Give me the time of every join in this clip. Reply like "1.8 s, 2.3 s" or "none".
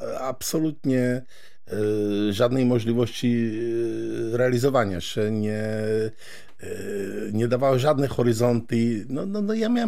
none